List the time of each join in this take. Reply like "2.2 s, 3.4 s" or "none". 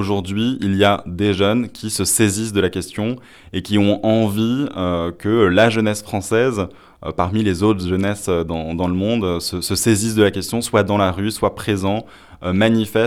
none

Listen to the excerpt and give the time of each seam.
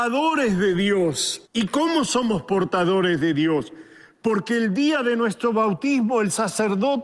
1.5 s

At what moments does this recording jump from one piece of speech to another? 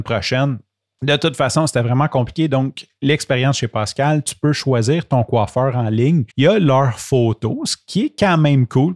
6.3 s

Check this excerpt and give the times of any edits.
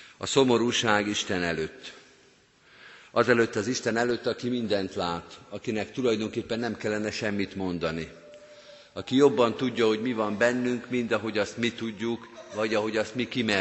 none

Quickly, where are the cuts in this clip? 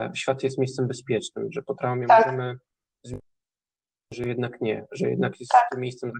none

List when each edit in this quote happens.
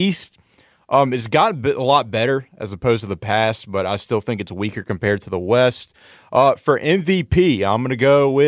none

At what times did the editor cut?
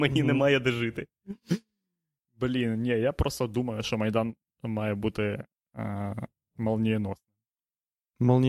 none

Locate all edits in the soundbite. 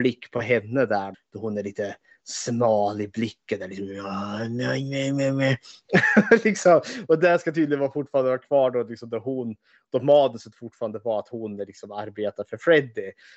1.1 s

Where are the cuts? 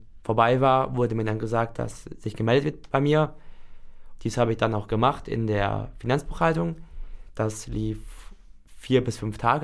1.7 s, 4.2 s

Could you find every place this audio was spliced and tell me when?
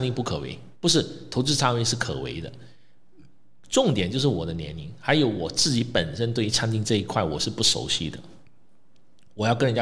none

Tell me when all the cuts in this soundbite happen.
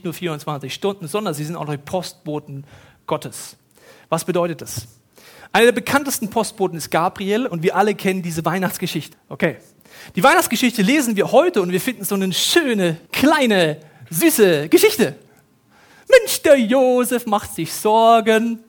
9.1 s, 13.1 s

